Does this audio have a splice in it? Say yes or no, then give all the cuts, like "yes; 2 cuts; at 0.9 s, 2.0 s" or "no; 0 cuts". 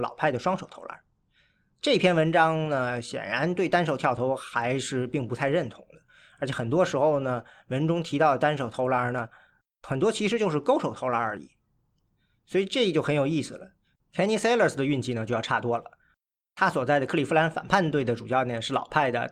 yes; 1 cut; at 14.0 s